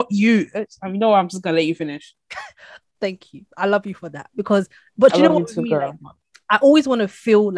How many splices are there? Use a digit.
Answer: 0